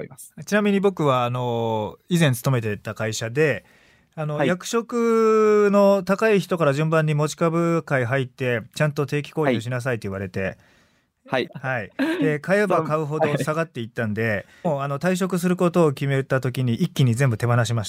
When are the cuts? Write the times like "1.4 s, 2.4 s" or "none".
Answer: 11.5 s, 14.6 s